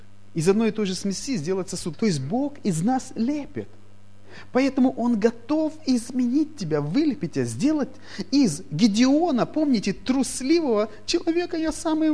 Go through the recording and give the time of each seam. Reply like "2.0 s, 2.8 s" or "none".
1.9 s